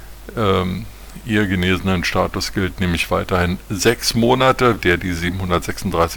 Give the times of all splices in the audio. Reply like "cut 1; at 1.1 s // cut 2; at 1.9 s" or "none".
cut 1; at 4.8 s